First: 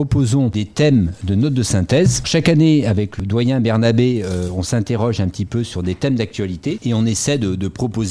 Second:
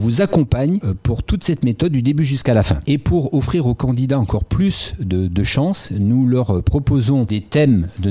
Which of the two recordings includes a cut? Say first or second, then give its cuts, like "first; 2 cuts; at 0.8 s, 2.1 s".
second; 1 cut; at 2.8 s